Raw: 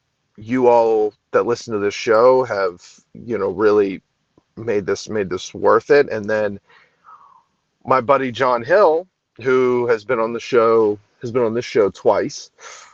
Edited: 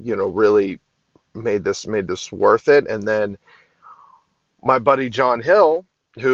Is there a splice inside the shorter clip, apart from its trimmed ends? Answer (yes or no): no